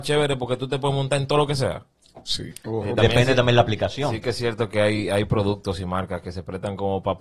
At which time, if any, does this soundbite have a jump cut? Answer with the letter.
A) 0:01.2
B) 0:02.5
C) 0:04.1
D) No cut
B